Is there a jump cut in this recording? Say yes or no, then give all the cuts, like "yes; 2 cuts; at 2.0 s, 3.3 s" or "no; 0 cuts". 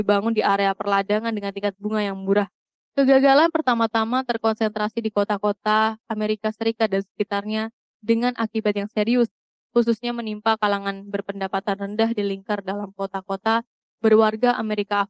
yes; 1 cut; at 2.7 s